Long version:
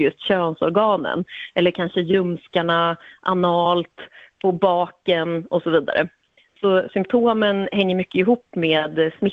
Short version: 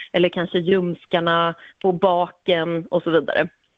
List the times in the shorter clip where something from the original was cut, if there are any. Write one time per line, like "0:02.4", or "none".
0:01.7